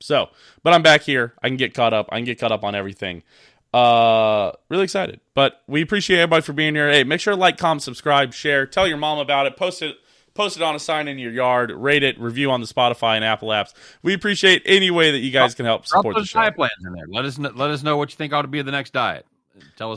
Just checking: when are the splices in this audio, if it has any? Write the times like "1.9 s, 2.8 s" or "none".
none